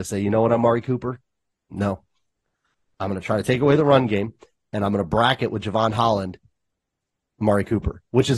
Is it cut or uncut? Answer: uncut